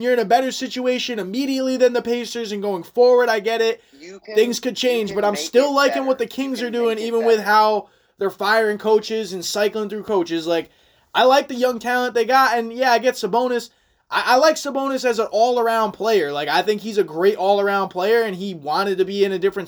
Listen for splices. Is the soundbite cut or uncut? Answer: uncut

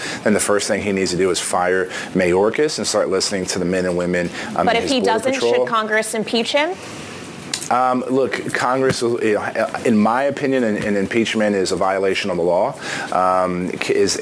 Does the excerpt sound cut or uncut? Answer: uncut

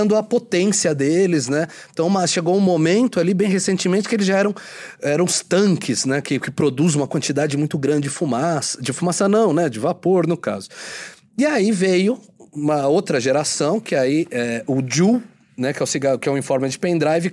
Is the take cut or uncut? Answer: uncut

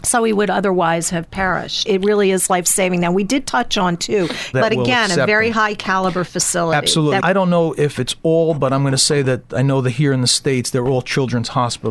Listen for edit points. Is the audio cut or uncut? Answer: cut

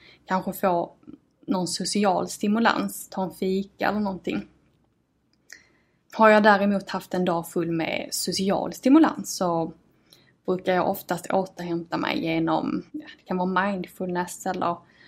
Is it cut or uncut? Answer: cut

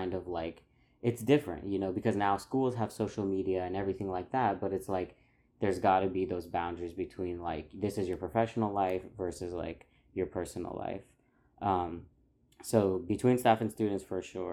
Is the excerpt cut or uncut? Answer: uncut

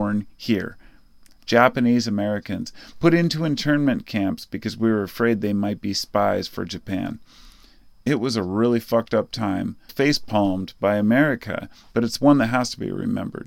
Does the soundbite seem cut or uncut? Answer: cut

